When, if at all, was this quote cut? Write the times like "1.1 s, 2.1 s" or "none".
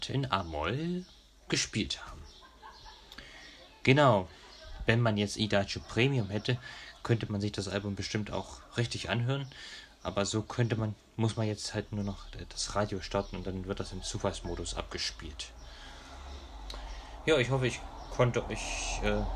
none